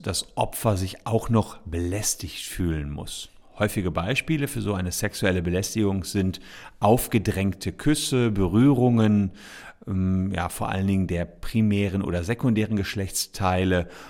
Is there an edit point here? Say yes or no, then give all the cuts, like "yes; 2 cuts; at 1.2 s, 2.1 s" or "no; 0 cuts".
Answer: no; 0 cuts